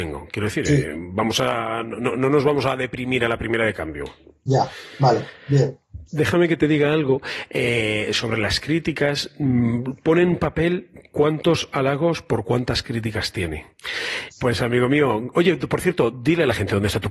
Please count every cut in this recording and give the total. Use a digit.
2